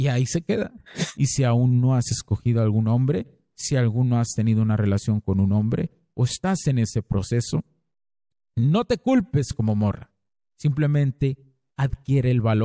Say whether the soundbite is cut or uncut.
cut